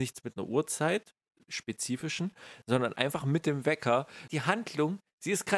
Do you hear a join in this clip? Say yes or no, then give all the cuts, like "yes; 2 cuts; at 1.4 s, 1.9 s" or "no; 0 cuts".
yes; 1 cut; at 4.3 s